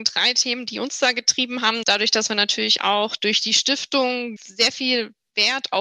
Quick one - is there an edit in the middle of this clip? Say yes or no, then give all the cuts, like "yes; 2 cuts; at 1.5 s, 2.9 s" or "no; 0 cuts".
yes; 2 cuts; at 1.8 s, 4.4 s